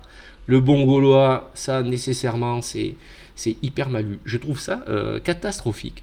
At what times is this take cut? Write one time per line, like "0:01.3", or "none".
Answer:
none